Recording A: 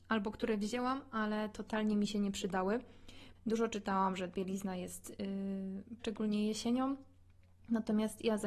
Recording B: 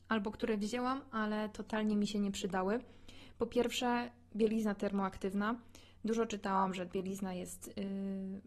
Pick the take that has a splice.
A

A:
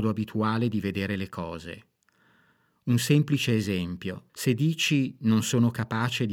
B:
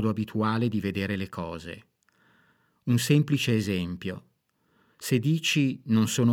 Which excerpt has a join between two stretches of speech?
A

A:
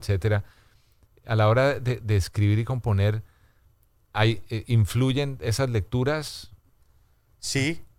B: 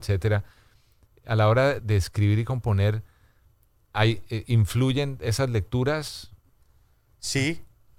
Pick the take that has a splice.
B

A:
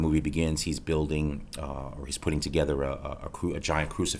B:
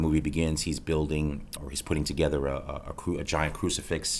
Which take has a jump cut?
B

